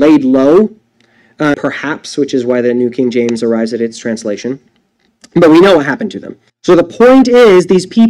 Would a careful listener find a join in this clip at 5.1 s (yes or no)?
no